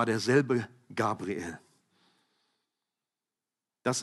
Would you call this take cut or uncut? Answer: uncut